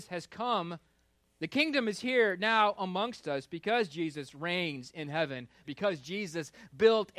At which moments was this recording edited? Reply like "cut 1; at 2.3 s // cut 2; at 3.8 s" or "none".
cut 1; at 1.2 s // cut 2; at 5.6 s